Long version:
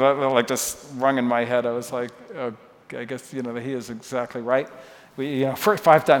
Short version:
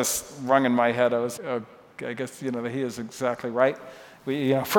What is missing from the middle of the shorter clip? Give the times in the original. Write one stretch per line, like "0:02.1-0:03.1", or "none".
0:01.9-0:02.3